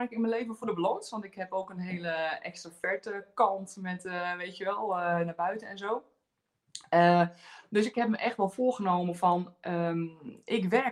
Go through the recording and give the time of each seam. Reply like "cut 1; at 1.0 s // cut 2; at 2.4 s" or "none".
none

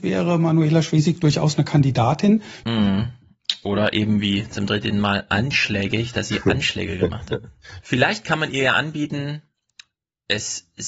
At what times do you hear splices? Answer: cut 1; at 2.6 s // cut 2; at 7.8 s

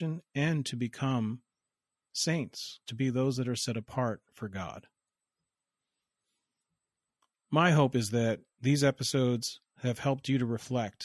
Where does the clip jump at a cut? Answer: cut 1; at 2.9 s

